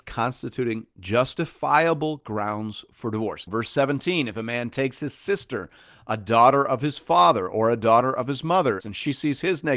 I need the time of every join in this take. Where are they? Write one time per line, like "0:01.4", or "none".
0:03.5
0:08.8